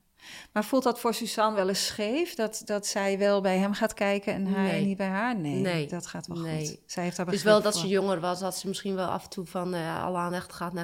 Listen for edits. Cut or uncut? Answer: uncut